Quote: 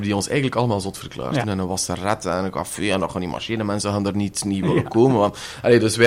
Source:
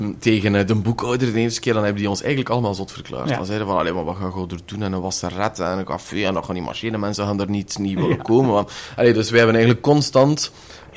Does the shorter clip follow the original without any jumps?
no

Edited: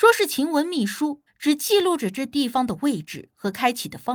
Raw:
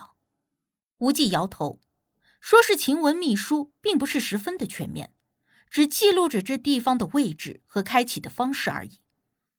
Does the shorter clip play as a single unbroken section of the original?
no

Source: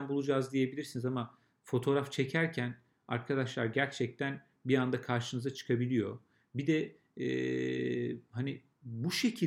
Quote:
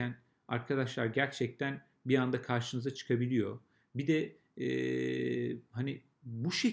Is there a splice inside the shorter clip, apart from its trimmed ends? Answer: no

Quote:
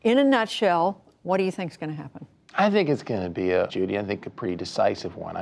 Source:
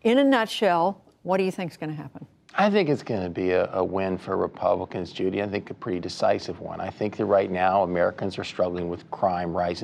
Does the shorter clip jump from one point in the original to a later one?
yes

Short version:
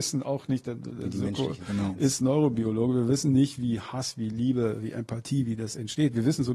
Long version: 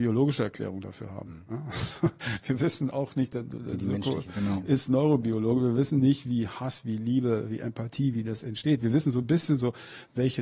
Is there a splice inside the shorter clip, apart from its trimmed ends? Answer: no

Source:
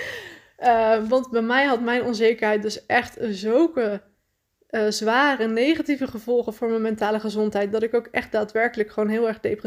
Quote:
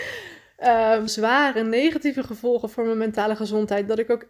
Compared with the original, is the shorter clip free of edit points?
no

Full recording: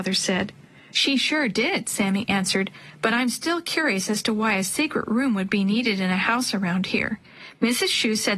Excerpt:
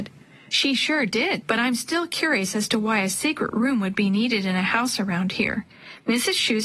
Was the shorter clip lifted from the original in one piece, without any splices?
no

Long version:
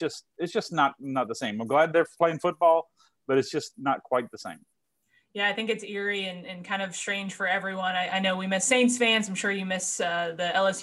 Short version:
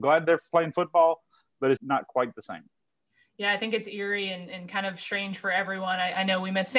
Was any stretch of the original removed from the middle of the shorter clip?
yes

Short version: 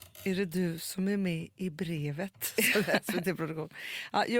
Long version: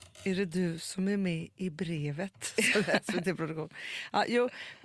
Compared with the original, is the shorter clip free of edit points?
yes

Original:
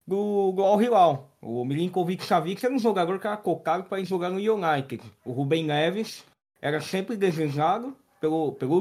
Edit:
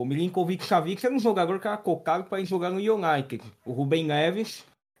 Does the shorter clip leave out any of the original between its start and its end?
no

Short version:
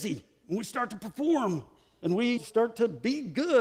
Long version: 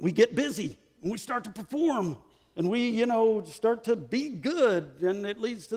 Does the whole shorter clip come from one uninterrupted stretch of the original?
no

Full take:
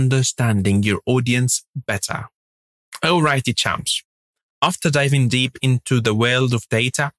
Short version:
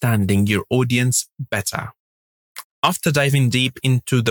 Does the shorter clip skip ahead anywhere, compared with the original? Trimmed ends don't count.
yes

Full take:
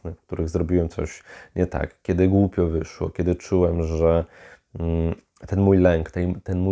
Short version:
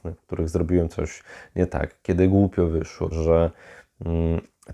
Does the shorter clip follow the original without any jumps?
no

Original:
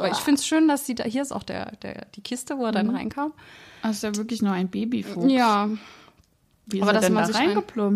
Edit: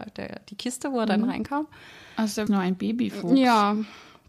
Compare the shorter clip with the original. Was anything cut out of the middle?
yes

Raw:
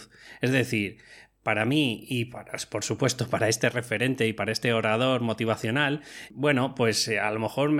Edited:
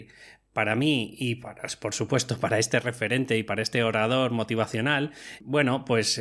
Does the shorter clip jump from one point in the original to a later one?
no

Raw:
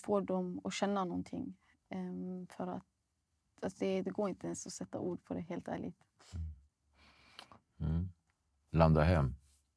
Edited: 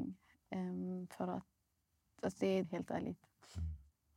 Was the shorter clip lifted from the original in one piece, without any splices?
no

